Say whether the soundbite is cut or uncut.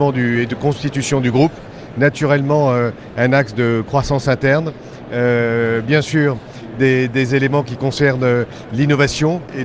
uncut